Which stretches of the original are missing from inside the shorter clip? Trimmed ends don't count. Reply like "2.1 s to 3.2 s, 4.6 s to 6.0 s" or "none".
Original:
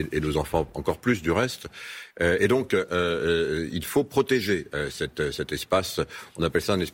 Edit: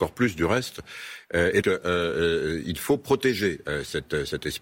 2.5 s to 2.7 s